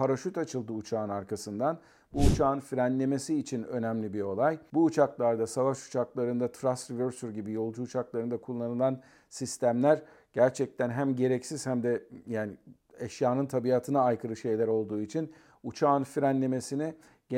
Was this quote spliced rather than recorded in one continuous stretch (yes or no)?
no